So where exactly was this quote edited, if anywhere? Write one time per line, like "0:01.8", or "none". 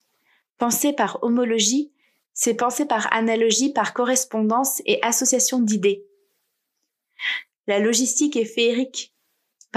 0:07.5